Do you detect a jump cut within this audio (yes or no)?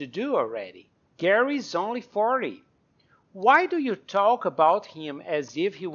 yes